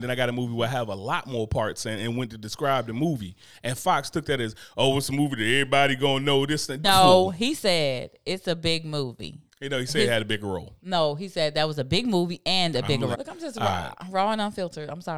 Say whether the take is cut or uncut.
cut